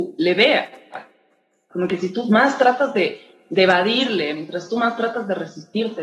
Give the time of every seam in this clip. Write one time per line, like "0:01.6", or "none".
0:01.7